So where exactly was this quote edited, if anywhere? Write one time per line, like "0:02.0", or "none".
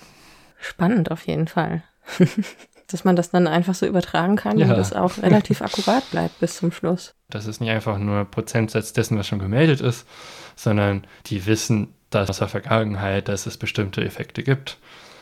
0:07.3
0:12.3